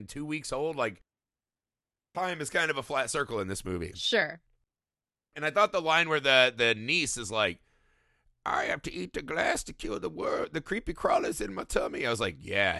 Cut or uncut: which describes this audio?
uncut